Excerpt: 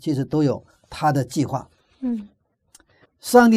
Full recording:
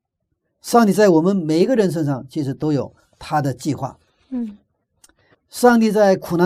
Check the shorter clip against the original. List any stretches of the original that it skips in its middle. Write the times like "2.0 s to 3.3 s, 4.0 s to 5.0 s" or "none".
none